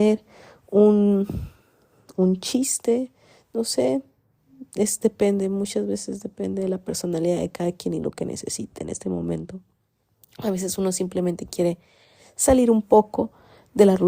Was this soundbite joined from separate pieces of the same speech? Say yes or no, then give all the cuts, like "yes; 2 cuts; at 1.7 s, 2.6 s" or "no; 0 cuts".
no; 0 cuts